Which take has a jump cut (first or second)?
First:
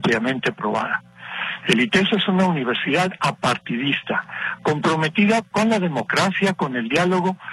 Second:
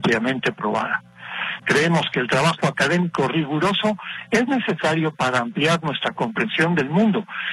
second